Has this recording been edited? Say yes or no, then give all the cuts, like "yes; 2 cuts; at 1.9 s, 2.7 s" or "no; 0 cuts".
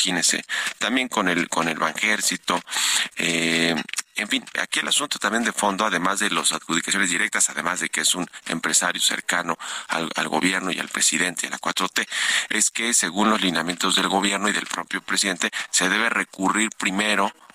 no; 0 cuts